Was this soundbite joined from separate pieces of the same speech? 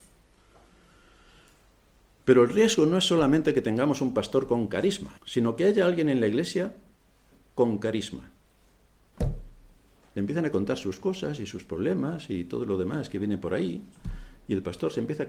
yes; 2 cuts; at 5.2 s, 9.1 s

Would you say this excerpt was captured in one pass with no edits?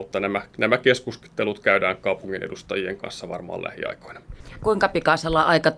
no; 1 cut; at 4.6 s

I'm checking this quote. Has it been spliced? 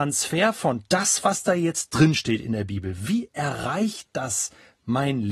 no; 0 cuts

